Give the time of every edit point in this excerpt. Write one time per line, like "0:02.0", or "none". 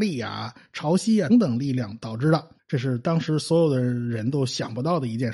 0:01.3
0:02.6